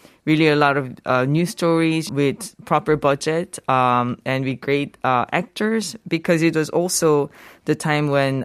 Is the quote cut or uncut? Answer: cut